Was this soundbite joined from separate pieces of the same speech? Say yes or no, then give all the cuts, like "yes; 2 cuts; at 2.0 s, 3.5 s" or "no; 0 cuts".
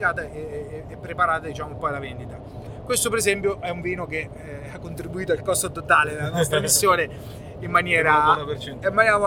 no; 0 cuts